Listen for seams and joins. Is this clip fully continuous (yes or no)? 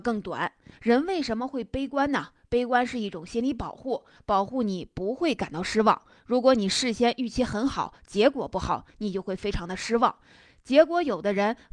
yes